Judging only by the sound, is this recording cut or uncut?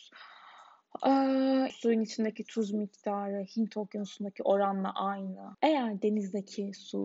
cut